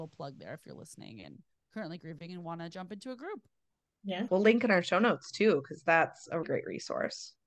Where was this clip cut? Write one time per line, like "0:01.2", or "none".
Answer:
0:04.3
0:06.4